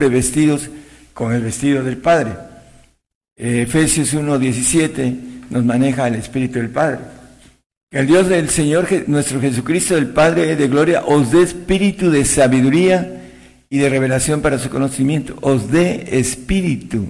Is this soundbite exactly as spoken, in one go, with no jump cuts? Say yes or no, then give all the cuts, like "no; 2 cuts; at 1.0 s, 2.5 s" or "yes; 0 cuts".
yes; 0 cuts